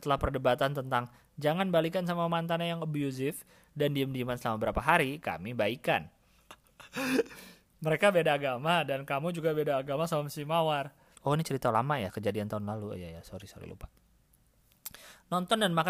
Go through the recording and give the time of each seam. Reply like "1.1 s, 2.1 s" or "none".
6.4 s, 11.2 s